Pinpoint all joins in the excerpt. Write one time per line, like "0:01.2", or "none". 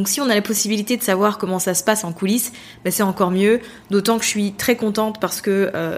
none

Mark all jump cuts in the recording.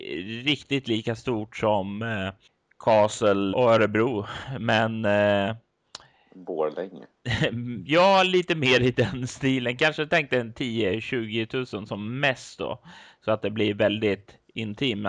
0:03.5

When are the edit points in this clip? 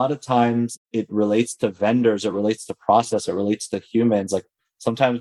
none

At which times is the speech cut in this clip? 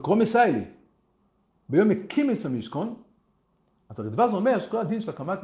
0:01.7
0:03.9

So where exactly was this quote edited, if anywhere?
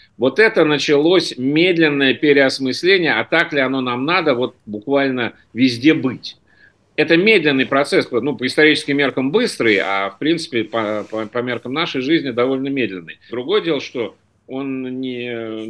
0:13.3

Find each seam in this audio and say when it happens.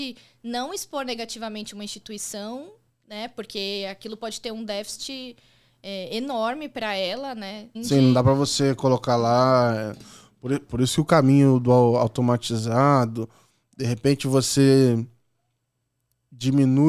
0:07.7

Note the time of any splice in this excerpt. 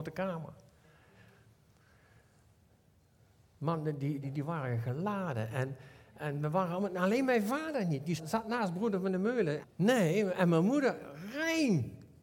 0:04.2
0:08.2
0:09.6

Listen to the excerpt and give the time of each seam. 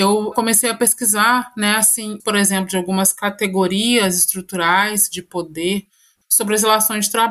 0:02.2
0:06.2

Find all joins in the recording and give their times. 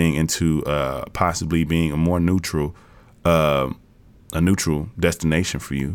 none

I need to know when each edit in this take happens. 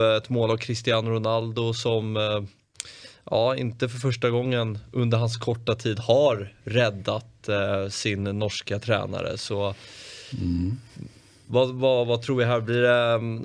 none

